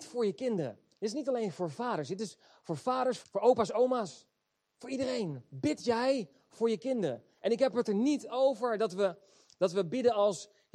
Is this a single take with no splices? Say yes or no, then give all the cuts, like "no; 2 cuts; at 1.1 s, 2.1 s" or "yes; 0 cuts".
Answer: no; 1 cut; at 3.2 s